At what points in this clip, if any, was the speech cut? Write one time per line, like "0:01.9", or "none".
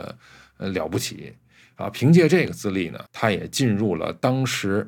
0:03.1

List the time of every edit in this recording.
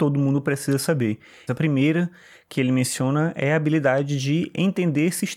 0:01.5

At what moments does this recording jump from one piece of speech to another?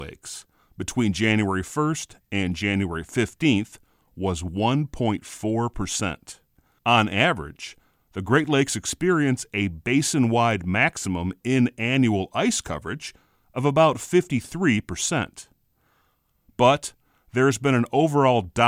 0:06.8

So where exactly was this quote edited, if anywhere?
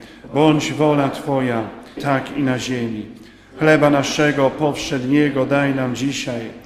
0:02.0

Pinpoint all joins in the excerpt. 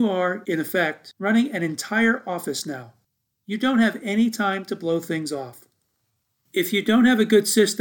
none

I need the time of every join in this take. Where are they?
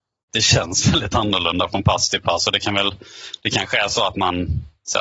none

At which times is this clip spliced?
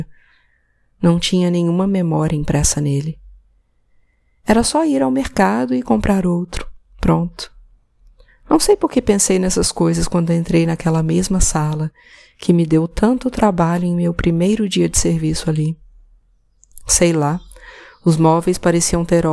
none

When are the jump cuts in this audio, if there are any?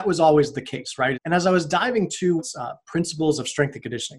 0:01.1
0:02.4

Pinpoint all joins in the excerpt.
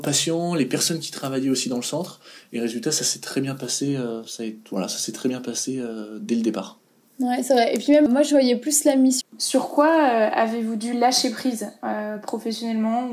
0:08.1
0:09.2

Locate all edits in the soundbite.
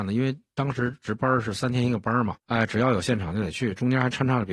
0:02.4

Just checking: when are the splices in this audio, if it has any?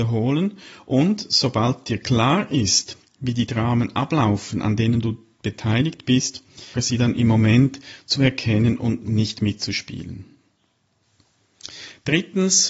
0:06.7

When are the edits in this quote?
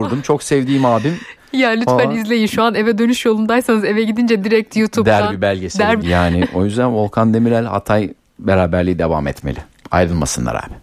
0:06.0

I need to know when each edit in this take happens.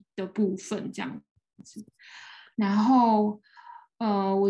0:02.5

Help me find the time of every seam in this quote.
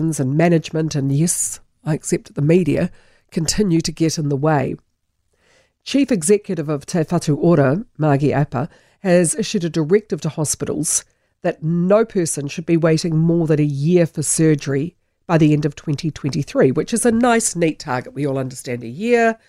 none

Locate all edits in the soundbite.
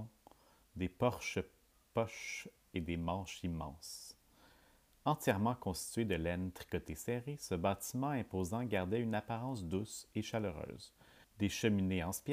0:11.2

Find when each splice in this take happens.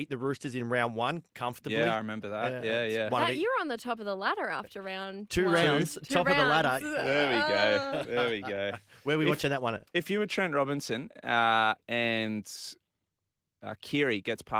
0:06.8

